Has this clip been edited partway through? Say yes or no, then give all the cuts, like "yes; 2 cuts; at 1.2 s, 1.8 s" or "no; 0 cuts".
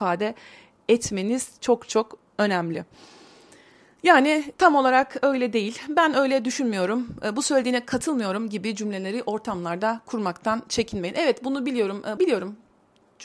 yes; 1 cut; at 12.2 s